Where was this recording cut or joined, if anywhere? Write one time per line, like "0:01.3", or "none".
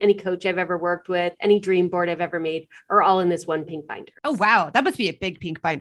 0:04.2